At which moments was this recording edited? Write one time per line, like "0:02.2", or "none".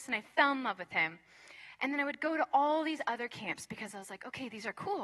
none